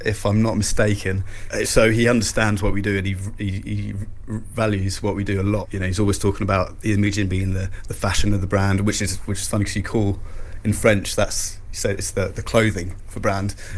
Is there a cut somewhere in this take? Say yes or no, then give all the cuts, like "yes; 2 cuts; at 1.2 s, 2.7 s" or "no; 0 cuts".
no; 0 cuts